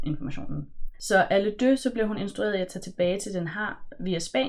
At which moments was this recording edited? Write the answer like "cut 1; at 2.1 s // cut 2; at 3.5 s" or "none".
cut 1; at 0.9 s

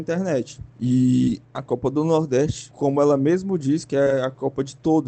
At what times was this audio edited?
none

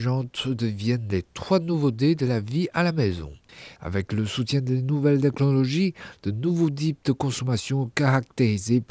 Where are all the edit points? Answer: cut 1; at 3.8 s

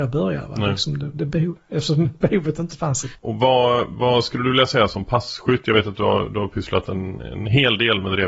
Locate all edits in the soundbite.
cut 1; at 3.2 s

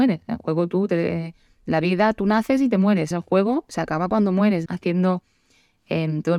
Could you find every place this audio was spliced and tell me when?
cut 1; at 3.1 s // cut 2; at 4.7 s

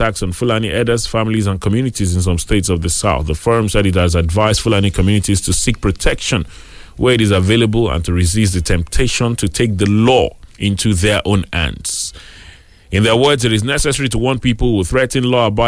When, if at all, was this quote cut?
cut 1; at 10.5 s

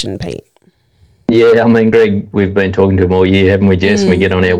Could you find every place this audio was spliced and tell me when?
none

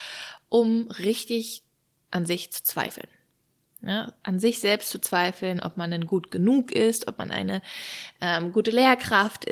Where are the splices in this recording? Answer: none

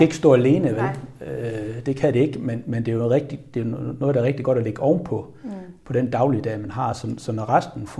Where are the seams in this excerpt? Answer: none

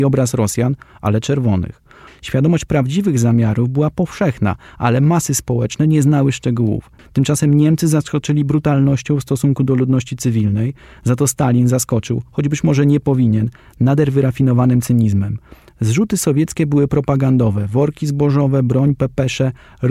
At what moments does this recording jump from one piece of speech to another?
cut 1; at 2.1 s // cut 2; at 7.0 s

